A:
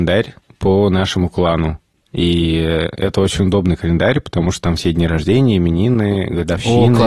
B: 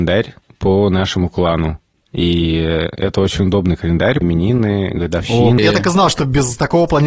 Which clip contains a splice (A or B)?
B